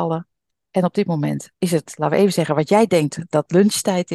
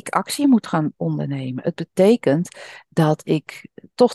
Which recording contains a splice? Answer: first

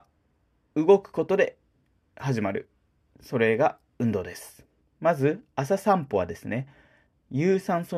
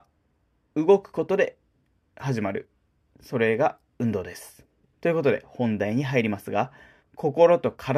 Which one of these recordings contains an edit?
first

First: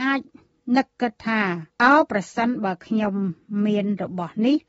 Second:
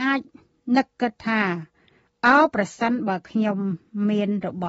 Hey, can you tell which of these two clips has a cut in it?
first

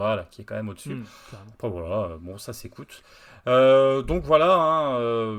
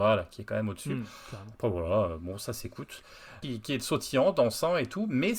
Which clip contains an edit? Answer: second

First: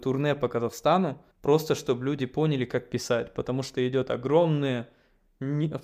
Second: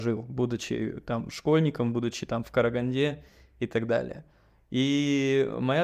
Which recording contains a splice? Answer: first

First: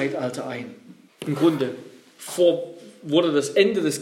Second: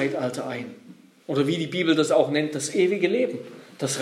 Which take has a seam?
first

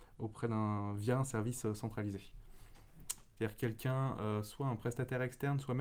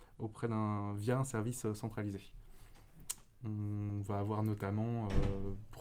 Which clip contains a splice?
first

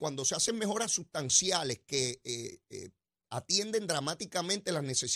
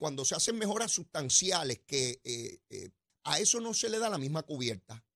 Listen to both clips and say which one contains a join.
second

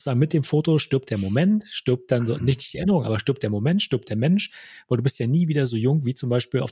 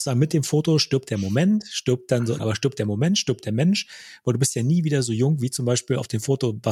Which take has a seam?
second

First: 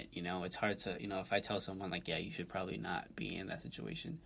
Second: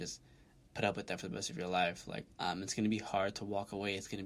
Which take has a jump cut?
second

